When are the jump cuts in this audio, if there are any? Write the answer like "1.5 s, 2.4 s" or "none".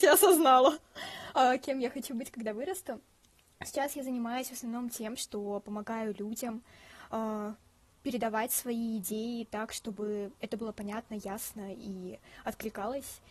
none